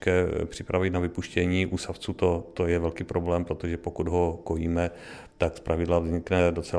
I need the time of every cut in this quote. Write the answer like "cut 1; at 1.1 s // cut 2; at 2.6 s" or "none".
cut 1; at 5.3 s